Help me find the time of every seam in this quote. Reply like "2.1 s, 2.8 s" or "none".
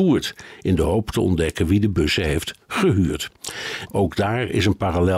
3.9 s